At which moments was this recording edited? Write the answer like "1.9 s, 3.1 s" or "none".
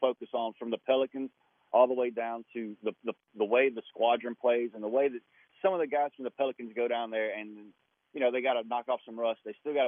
none